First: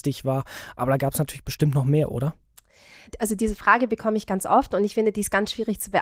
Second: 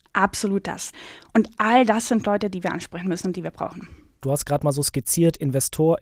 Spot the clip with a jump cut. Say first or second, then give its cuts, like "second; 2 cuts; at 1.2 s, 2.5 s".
second; 1 cut; at 4.2 s